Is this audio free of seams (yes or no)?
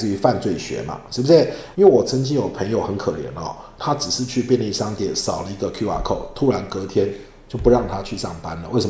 no